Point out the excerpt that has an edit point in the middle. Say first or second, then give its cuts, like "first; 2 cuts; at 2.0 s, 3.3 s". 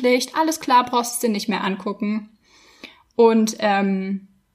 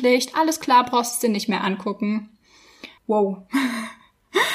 second; 1 cut; at 3.0 s